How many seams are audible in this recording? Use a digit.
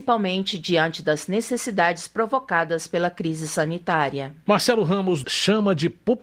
1